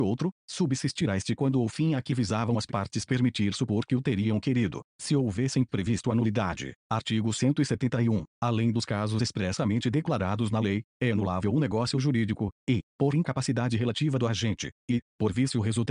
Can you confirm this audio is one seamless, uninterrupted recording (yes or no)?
yes